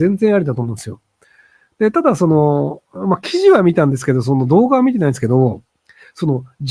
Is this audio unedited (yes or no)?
yes